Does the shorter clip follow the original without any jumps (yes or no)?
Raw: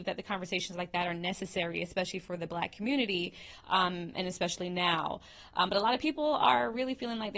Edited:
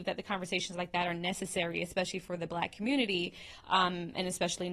yes